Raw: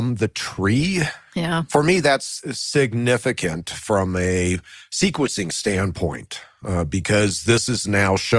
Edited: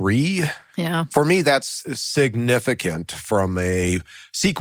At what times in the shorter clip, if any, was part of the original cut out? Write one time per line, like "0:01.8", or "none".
none